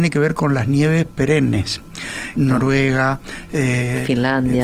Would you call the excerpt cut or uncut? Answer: cut